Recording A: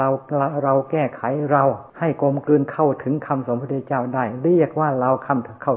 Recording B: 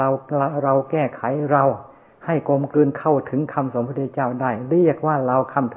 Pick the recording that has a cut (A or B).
A